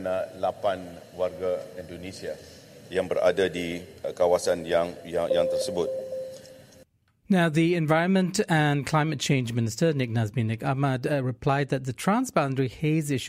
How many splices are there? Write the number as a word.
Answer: one